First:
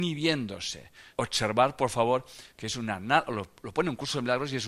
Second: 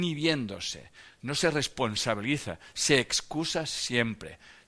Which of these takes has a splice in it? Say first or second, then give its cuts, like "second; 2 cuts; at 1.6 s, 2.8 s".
first; 2 cuts; at 1.1 s, 2.5 s